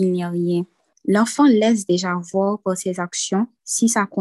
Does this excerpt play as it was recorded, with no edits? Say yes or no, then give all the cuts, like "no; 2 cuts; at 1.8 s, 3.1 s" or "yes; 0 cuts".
no; 1 cut; at 0.9 s